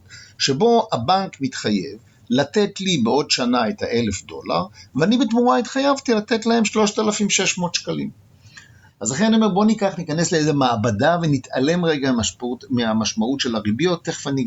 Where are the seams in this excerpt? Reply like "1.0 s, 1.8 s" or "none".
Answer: 8.9 s